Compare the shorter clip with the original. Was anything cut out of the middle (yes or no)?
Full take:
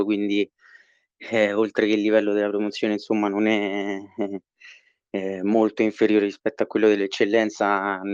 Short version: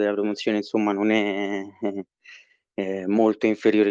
no